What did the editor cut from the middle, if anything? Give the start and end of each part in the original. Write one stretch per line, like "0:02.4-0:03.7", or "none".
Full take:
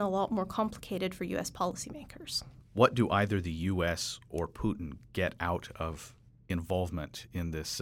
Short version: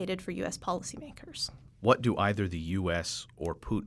none